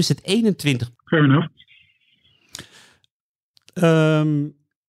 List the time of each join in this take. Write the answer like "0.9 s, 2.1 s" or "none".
0.9 s